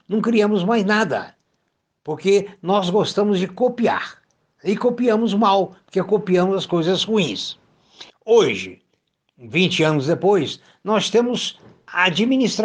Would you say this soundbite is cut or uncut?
cut